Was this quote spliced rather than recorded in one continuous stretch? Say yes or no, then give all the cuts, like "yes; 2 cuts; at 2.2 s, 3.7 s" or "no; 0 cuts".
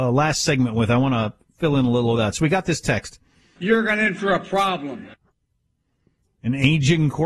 yes; 1 cut; at 3.6 s